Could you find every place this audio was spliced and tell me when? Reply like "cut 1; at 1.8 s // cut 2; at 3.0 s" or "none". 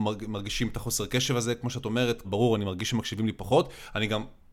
cut 1; at 2.2 s